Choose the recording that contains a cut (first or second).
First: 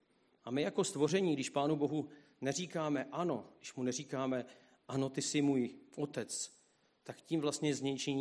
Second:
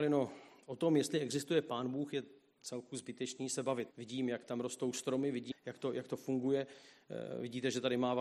second